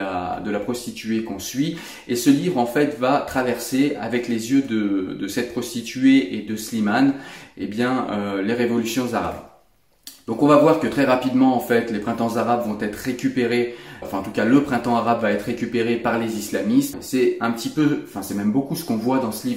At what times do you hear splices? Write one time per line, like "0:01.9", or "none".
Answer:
0:14.0
0:16.9